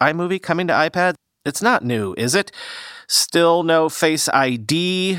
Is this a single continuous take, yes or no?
yes